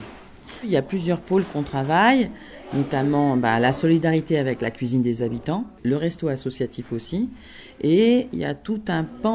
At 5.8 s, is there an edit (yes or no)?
yes